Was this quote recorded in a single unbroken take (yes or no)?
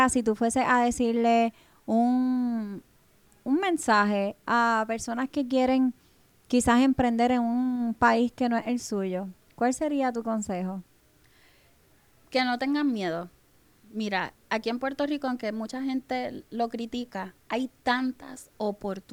no